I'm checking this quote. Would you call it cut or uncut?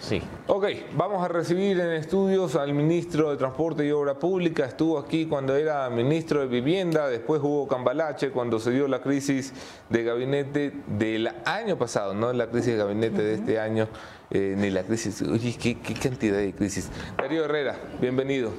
uncut